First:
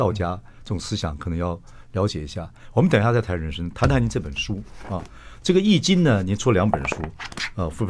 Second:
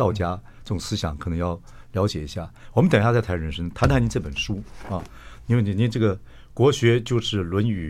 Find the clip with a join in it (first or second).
first